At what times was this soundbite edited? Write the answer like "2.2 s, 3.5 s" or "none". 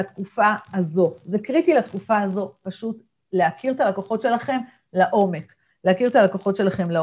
none